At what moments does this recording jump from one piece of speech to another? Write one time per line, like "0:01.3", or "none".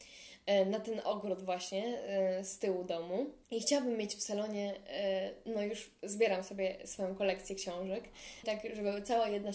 0:03.4
0:08.4